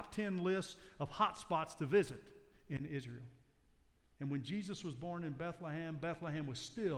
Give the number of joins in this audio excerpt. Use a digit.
0